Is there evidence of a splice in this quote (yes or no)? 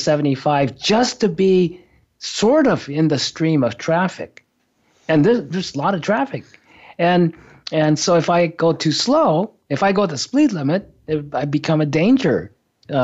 no